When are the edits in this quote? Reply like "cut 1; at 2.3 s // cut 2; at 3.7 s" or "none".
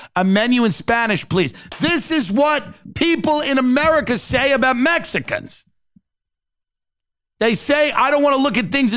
none